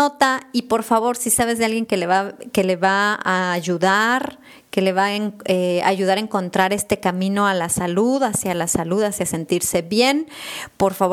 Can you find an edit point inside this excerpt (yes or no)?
no